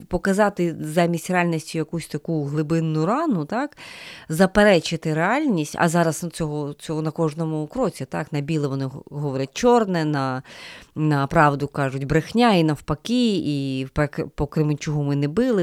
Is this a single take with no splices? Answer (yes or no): yes